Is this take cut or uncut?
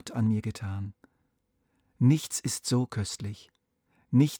uncut